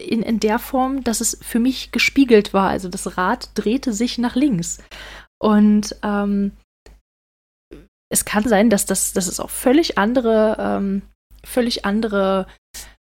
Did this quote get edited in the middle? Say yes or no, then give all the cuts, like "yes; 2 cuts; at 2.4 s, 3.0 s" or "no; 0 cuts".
no; 0 cuts